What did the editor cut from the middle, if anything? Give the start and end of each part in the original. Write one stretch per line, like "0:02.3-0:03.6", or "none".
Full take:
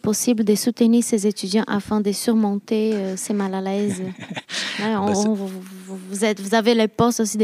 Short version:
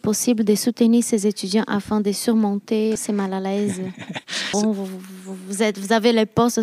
0:03.0-0:03.2
0:04.7-0:05.2